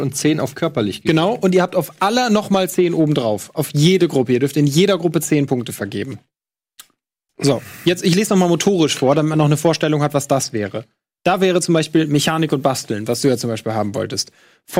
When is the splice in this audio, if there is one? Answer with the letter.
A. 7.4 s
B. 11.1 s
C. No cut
A